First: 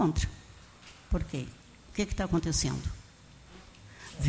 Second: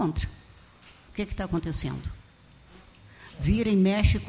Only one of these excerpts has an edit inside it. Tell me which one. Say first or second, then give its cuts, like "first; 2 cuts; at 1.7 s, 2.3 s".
second; 1 cut; at 1.1 s